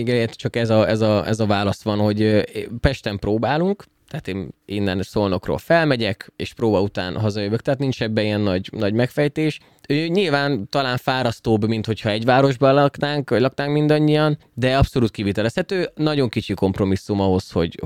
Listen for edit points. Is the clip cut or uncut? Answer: uncut